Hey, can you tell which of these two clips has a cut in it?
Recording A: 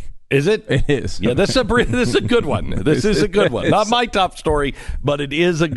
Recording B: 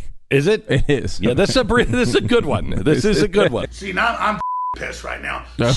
B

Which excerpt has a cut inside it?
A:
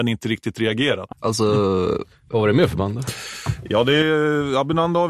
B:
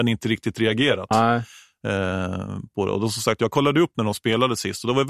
A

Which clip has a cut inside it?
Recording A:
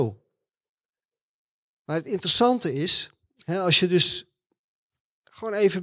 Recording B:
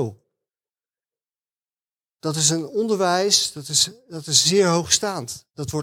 A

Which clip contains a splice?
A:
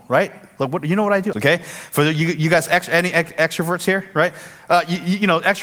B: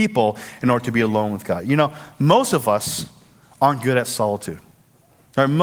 A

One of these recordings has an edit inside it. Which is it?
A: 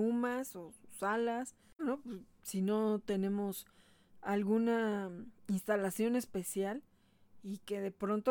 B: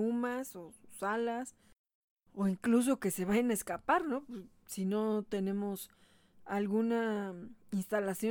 A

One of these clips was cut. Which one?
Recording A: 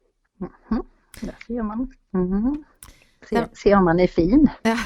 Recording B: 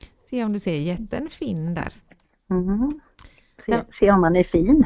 A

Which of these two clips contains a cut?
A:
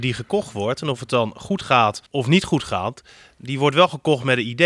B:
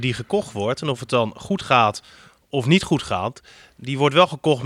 A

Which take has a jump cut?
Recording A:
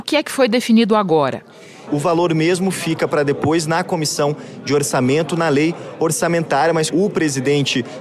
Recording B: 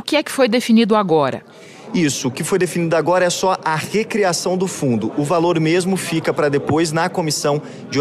A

